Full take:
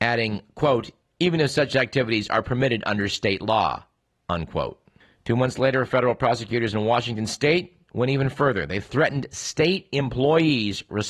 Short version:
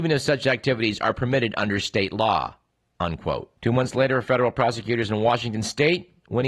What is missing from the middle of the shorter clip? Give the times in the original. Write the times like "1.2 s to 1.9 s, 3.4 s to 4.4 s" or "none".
4.9 s to 5.2 s